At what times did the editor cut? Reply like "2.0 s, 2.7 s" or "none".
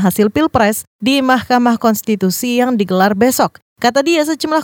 none